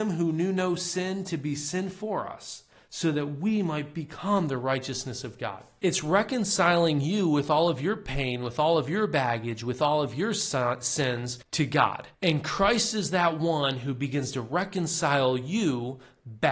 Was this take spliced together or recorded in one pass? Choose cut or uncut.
cut